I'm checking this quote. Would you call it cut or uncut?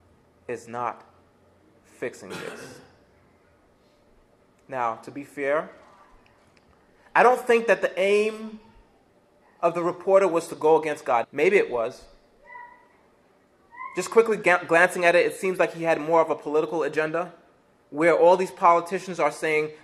cut